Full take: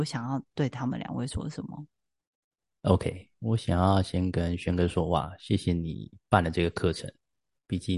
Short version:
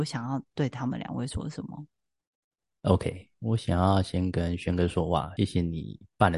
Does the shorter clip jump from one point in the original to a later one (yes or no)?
yes